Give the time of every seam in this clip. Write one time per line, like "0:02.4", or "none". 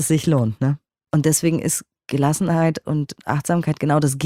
0:01.1